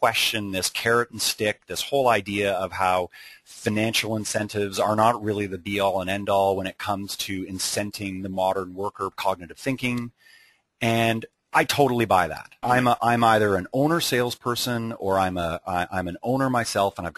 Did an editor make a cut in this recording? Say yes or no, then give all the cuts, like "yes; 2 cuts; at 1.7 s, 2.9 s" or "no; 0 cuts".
yes; 2 cuts; at 9.1 s, 12.6 s